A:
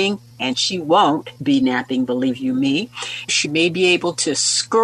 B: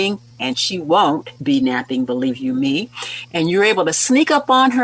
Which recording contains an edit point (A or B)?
A